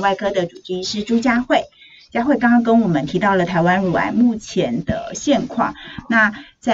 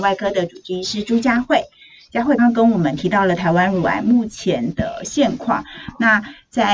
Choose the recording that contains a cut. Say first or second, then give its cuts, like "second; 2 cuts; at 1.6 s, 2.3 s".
second; 1 cut; at 2.4 s